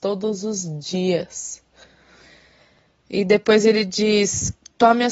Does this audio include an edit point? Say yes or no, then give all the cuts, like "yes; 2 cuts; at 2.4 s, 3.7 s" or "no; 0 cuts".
no; 0 cuts